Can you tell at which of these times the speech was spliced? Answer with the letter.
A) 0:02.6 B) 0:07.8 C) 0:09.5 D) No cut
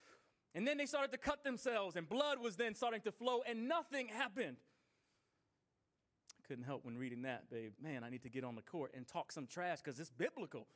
B